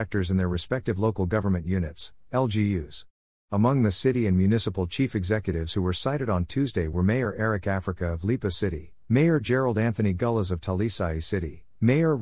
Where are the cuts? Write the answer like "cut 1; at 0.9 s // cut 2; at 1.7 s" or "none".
cut 1; at 3.4 s